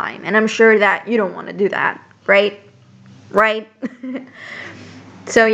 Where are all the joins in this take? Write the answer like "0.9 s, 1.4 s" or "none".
none